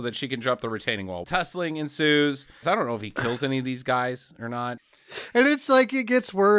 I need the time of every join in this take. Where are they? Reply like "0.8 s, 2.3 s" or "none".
1.2 s, 2.6 s, 4.8 s